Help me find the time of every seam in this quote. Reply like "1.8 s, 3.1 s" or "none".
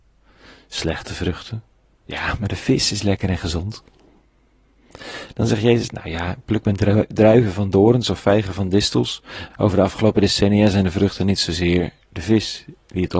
9.5 s